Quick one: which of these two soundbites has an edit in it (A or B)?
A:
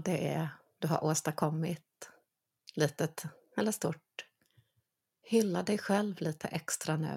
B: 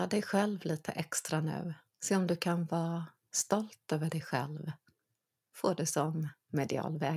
B